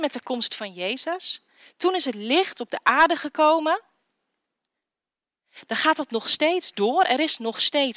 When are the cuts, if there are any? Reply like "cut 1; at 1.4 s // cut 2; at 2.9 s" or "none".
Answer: none